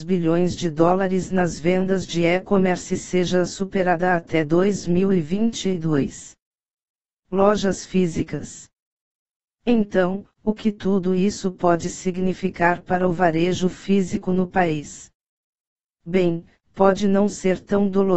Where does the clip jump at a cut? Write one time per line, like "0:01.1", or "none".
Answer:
none